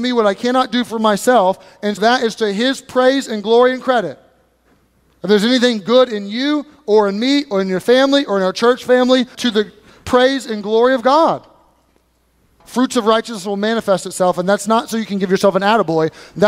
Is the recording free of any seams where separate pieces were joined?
no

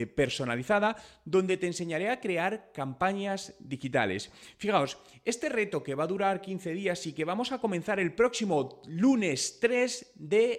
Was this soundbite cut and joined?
no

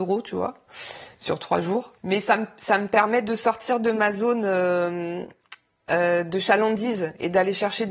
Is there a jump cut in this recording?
yes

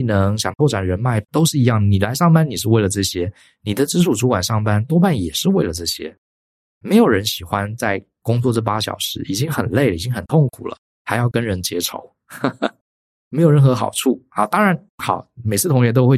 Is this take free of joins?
yes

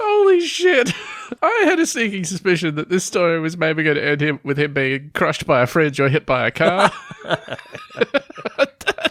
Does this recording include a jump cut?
yes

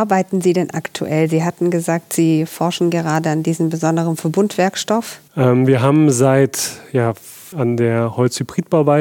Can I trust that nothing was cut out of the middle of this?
no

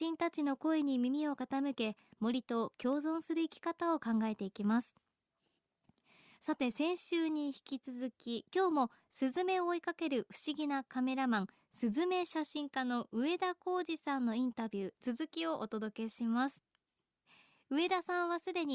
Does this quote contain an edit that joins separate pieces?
no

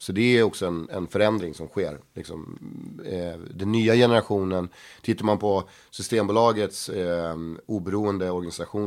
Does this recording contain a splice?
no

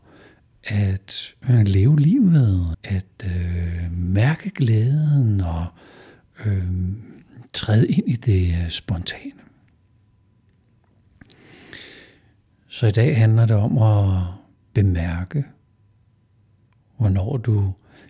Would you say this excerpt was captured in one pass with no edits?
no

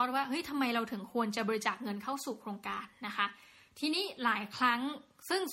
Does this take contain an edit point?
no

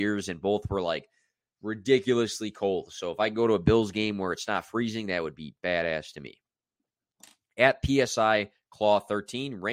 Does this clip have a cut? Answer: no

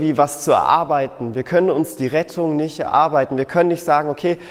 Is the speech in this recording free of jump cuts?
yes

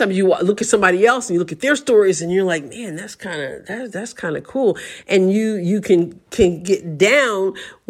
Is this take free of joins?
yes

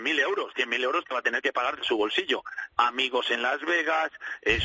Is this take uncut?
no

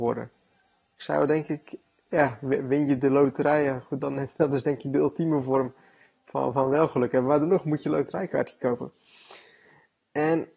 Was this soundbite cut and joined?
yes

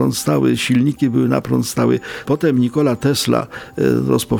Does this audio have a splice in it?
yes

